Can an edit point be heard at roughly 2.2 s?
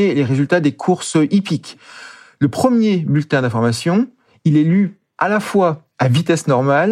no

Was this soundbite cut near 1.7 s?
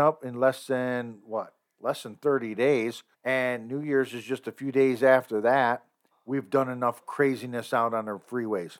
no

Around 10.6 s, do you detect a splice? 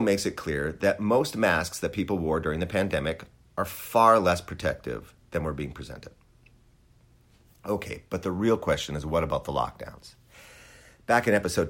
no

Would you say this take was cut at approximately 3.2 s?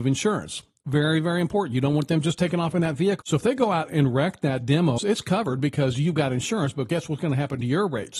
yes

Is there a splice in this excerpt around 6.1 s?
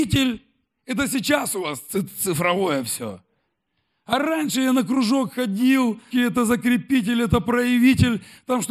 yes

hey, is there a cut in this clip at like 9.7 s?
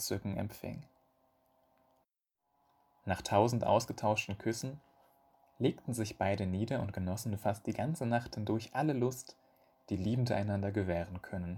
no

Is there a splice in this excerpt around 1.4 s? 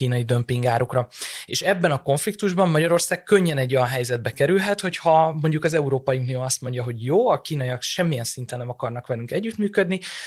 no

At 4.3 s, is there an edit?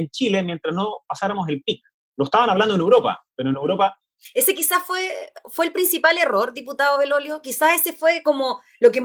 no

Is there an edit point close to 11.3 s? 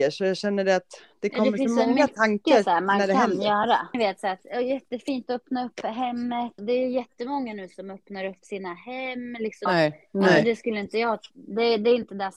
no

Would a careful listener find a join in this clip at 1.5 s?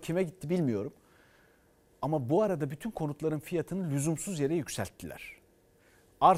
no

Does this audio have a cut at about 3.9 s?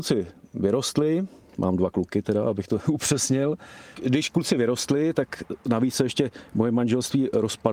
yes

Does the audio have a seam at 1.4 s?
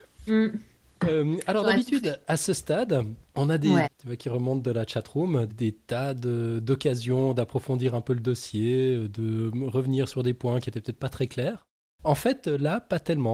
no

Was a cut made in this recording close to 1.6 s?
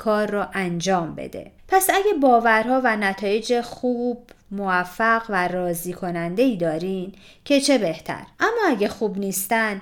yes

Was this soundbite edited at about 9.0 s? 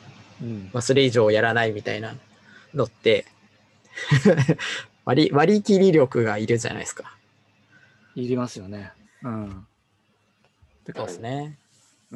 yes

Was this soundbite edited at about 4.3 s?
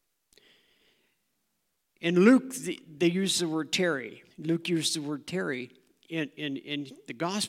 yes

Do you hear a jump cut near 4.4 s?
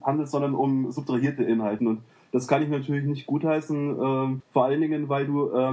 yes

